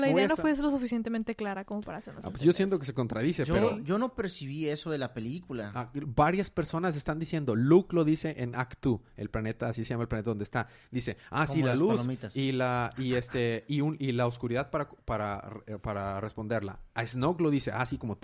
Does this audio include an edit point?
no; 0 cuts

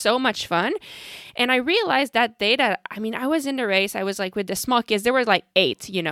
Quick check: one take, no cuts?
yes; 0 cuts

